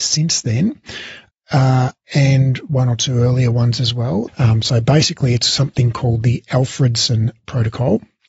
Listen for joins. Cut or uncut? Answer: cut